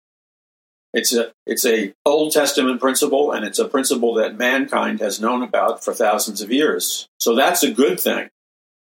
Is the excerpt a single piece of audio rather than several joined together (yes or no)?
no